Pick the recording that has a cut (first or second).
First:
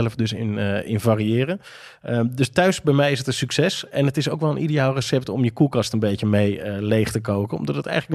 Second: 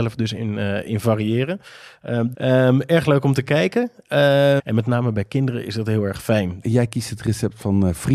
second